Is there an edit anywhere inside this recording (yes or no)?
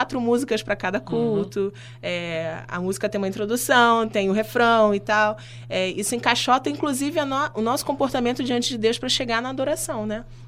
no